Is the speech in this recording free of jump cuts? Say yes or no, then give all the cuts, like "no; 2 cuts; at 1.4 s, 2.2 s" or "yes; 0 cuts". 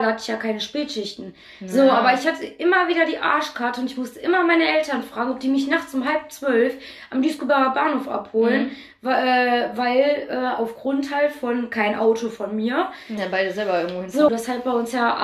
no; 2 cuts; at 13.2 s, 14.3 s